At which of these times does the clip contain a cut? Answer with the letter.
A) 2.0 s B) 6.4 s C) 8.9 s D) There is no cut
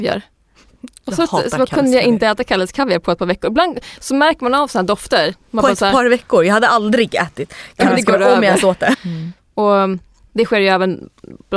C